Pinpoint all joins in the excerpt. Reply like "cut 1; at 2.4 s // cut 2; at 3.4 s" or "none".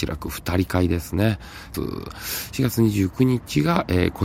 cut 1; at 1.7 s